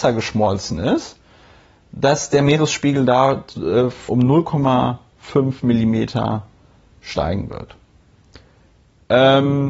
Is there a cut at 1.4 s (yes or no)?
no